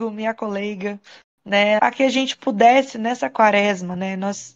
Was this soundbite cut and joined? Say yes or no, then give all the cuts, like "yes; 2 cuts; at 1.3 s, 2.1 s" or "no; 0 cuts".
yes; 1 cut; at 1.8 s